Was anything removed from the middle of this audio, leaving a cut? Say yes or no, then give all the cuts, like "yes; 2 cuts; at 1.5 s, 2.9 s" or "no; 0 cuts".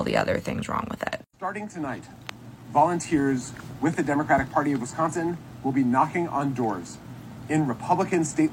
yes; 1 cut; at 1.2 s